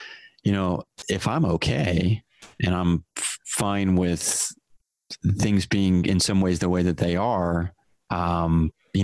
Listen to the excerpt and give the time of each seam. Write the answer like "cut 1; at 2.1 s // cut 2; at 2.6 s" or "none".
none